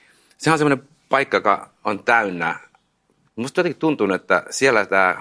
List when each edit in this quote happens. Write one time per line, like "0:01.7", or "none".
0:03.3